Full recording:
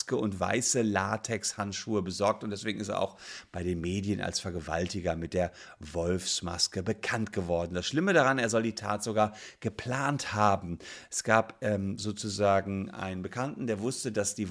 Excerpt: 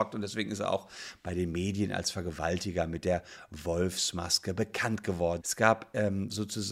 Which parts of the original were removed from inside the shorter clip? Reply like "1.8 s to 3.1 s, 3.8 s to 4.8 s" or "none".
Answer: 7.7 s to 11.1 s